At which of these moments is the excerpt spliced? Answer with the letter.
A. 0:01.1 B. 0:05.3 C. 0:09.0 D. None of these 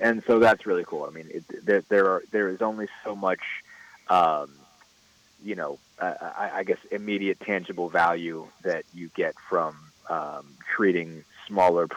D